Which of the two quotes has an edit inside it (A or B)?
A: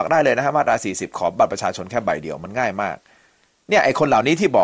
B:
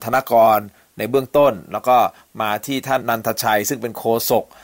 B